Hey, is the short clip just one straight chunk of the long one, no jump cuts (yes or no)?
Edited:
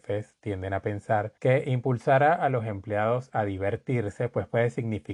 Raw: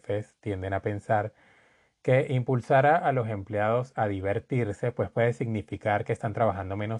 no